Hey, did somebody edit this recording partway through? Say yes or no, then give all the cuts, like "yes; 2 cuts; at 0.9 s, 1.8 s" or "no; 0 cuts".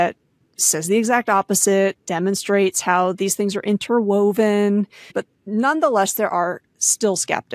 yes; 1 cut; at 5.1 s